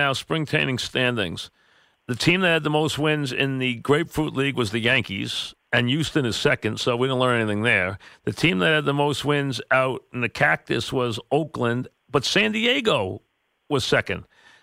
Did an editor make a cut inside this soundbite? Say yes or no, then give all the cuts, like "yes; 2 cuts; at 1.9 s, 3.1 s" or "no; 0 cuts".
no; 0 cuts